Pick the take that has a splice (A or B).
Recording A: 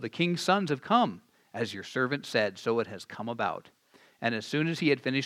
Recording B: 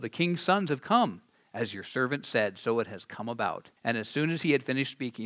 B